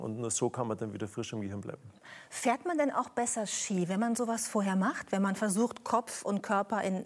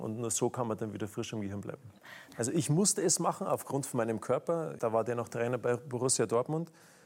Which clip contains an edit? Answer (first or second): second